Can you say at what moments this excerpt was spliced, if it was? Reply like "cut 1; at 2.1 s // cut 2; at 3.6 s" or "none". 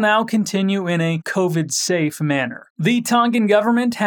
cut 1; at 2.7 s